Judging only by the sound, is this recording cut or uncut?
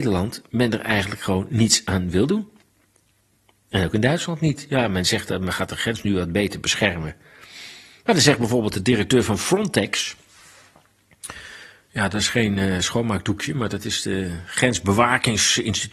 uncut